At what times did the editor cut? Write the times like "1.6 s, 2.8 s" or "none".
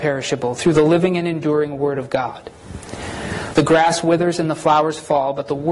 3.5 s